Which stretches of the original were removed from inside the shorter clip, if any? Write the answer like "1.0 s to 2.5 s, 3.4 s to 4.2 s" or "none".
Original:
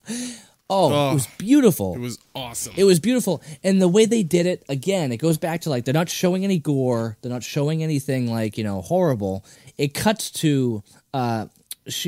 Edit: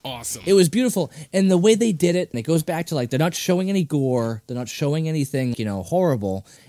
4.6 s to 5.1 s, 8.3 s to 8.5 s